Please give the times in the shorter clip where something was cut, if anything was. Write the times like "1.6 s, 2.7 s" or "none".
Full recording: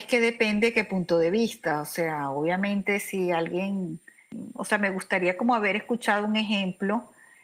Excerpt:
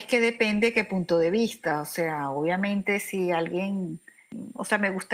none